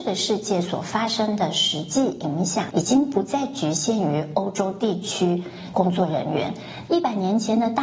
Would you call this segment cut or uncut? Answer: cut